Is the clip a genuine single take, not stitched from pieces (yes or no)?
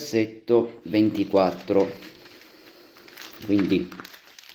yes